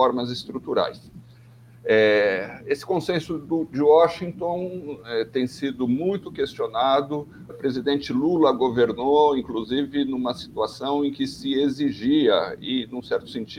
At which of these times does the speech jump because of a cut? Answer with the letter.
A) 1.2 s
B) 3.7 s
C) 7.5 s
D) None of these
C